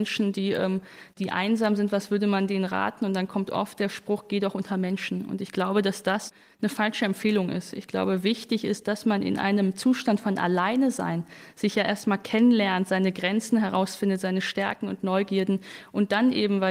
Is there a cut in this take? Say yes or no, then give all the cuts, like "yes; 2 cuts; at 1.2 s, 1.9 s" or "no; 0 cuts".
no; 0 cuts